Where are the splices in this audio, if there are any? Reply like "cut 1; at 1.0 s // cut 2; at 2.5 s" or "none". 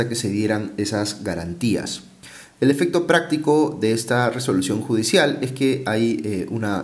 cut 1; at 2.6 s

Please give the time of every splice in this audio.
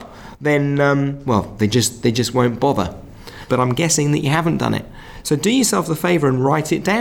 cut 1; at 3.5 s // cut 2; at 5.2 s

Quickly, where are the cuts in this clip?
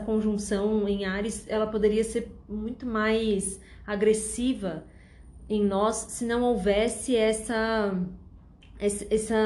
none

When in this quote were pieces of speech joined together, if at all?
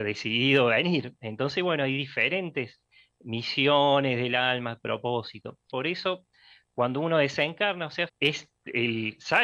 cut 1; at 5.7 s // cut 2; at 8.1 s

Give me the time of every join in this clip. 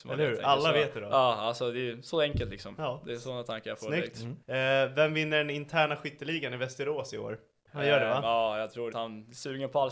cut 1; at 4.4 s // cut 2; at 7.7 s // cut 3; at 8.9 s

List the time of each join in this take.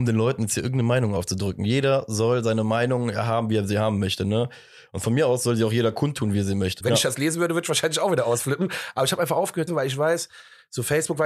cut 1; at 6.8 s // cut 2; at 9.7 s

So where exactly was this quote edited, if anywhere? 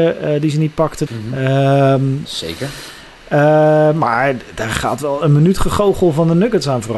cut 1; at 1.1 s // cut 2; at 2.2 s

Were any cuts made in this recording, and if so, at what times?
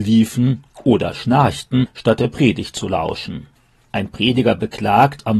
cut 1; at 3.8 s

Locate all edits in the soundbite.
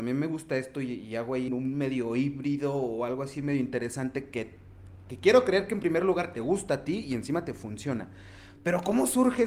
cut 1; at 1.5 s

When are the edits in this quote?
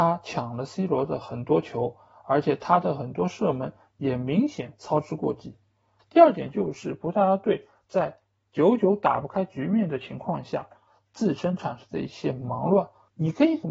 cut 1; at 6.0 s

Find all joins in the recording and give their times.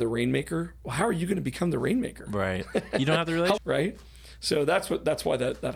cut 1; at 3.6 s

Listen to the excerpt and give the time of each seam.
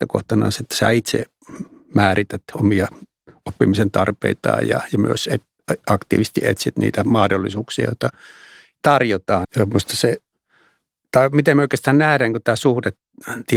cut 1; at 9.4 s

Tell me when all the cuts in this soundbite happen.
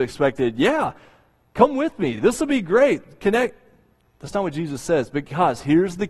none

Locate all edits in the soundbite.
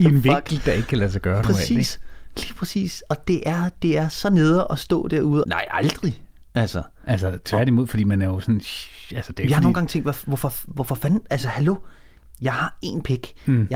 cut 1; at 5.4 s

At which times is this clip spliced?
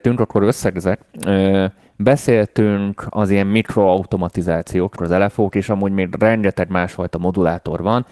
cut 1; at 5.0 s

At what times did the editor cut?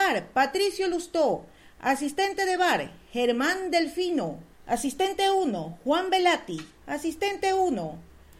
cut 1; at 4.5 s // cut 2; at 6.8 s

